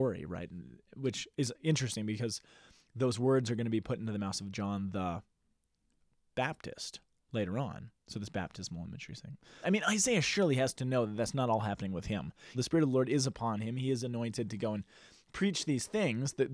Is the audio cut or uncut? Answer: cut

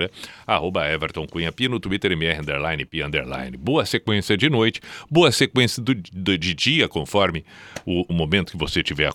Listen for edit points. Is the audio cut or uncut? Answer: cut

